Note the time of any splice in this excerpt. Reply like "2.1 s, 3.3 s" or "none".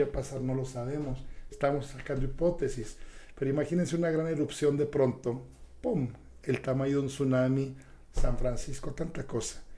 none